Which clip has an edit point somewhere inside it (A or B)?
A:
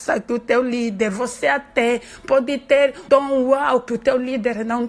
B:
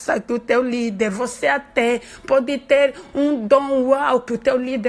A